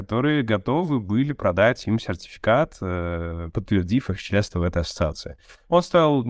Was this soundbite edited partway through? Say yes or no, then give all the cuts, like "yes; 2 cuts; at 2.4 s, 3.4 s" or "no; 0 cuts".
no; 0 cuts